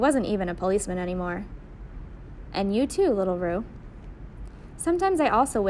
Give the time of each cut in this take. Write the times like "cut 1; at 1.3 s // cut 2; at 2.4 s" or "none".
cut 1; at 2.5 s